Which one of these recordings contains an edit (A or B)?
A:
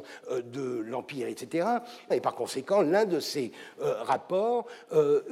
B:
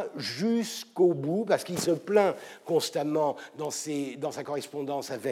A